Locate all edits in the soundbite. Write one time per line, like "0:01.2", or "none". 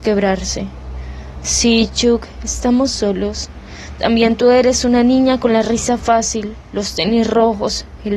none